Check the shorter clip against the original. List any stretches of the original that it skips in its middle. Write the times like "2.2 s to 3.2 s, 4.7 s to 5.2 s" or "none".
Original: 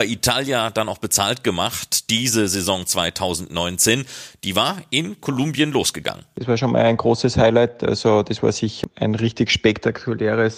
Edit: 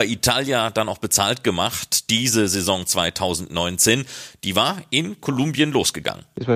none